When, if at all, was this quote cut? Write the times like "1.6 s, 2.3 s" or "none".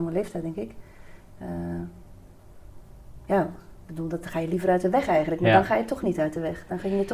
none